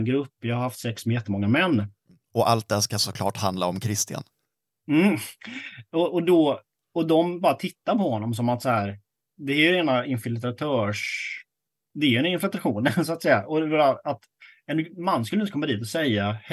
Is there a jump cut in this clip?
no; 0 cuts

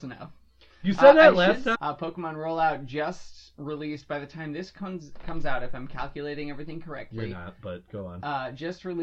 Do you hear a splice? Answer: yes; 1 cut; at 1.7 s

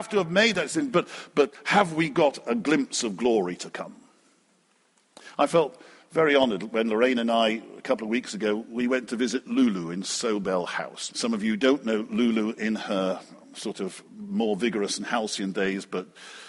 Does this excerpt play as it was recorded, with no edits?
no; 1 cut; at 11.1 s

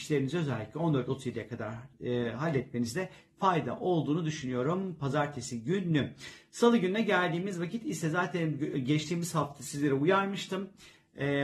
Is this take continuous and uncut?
yes; 0 cuts

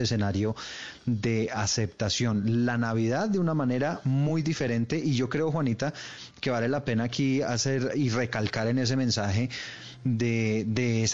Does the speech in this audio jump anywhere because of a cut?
no; 0 cuts

